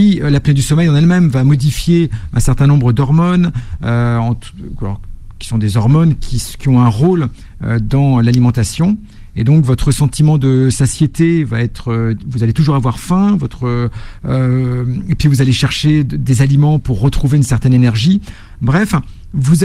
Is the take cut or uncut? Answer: uncut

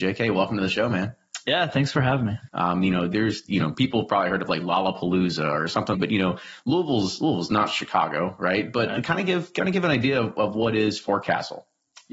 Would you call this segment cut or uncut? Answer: cut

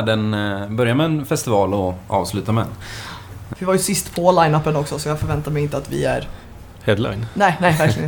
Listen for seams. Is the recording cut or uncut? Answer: cut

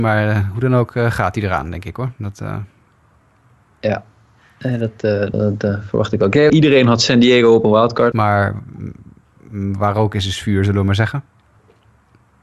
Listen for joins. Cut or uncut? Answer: cut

